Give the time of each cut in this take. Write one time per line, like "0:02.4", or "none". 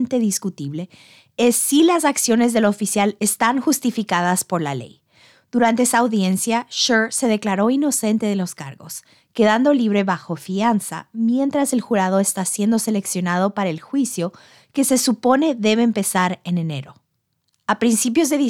none